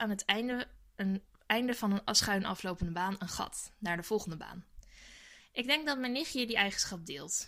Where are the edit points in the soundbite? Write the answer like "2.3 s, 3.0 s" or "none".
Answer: 5.4 s

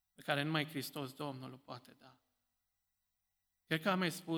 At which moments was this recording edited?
none

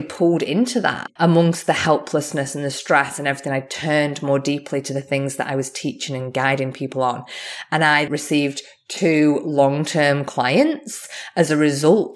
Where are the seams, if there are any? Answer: 1.2 s, 8.1 s

